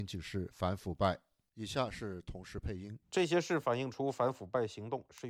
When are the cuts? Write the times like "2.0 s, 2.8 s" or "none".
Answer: 3.0 s

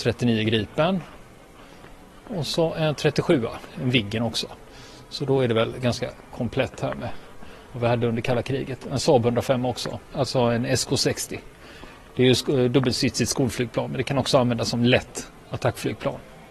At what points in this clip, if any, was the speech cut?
none

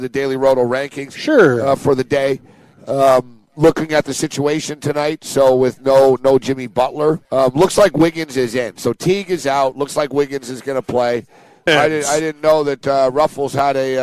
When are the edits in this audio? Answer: 7.2 s, 11.7 s

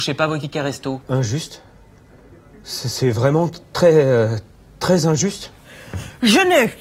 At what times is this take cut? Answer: 1.0 s

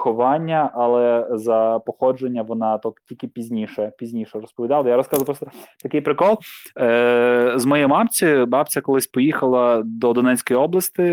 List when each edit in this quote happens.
none

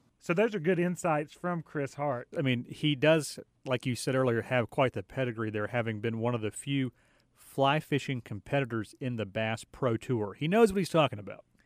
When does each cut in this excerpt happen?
2.3 s

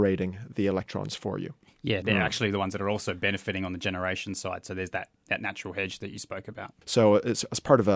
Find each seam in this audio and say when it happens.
2.0 s, 6.8 s

